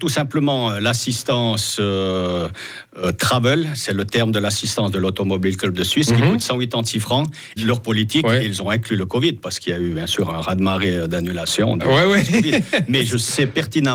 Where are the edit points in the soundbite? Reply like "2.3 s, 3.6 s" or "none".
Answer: 7.6 s